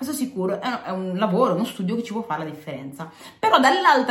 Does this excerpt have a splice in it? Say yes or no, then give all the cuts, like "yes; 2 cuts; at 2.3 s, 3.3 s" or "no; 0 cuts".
no; 0 cuts